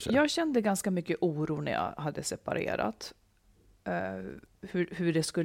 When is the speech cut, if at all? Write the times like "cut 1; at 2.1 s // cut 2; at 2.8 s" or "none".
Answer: none